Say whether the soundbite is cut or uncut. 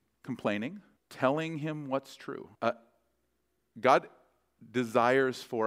cut